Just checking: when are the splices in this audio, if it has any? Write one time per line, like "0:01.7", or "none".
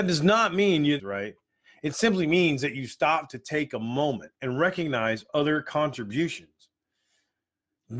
0:01.0
0:04.4